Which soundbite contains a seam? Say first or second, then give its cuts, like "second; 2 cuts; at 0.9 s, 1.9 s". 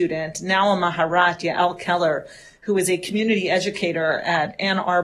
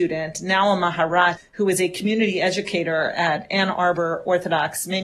second; 1 cut; at 1.4 s